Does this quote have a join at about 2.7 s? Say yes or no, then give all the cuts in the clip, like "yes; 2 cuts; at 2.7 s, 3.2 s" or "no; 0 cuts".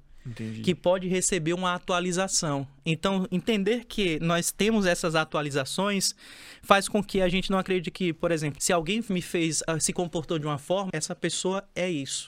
no; 2 cuts; at 8.6 s, 10.9 s